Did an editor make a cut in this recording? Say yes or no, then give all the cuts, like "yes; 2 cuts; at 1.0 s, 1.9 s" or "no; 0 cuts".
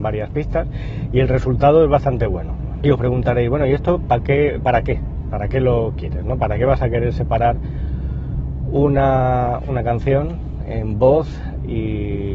yes; 2 cuts; at 2.8 s, 9.7 s